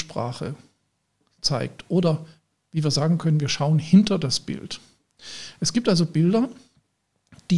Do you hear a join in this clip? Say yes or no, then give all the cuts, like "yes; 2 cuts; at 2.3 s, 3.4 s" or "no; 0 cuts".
no; 0 cuts